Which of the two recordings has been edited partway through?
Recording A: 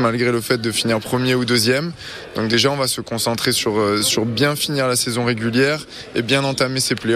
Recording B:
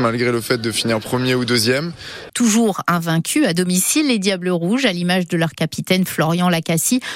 B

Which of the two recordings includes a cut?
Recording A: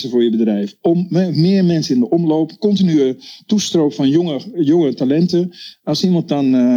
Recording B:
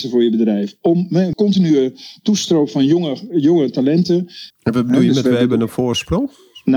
B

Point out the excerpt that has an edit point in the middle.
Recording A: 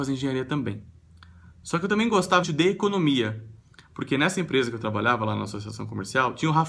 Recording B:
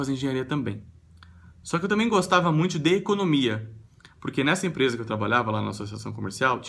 A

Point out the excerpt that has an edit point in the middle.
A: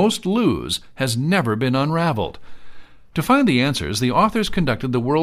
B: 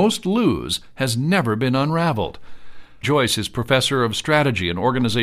B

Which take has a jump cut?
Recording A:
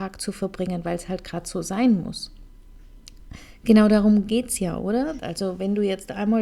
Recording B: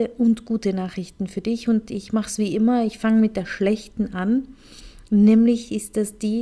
A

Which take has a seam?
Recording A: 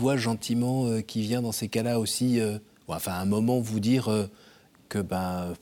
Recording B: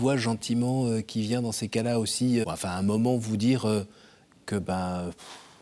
B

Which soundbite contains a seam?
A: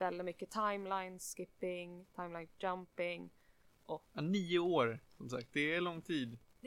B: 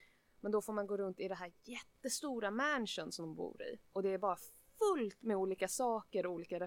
A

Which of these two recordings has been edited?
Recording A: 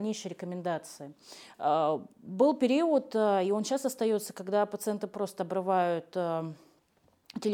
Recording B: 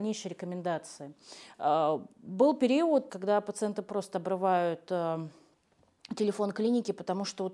B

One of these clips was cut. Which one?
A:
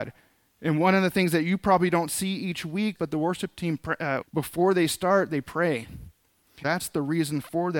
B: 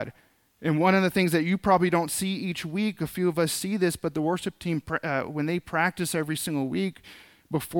A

